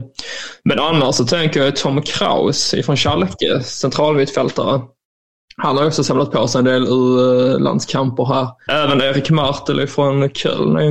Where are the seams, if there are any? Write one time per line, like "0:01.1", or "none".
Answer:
0:08.7